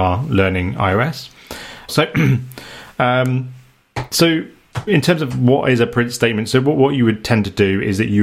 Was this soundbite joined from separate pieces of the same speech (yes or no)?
yes